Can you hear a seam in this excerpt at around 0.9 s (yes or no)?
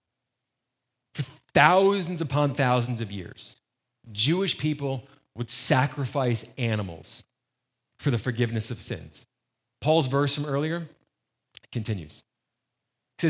yes